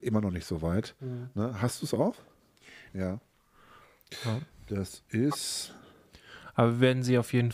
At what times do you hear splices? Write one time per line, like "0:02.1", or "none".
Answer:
0:02.9